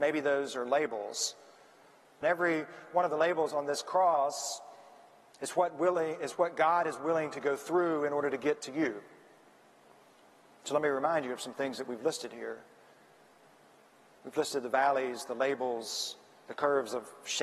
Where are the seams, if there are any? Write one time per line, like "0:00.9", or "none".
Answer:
0:02.2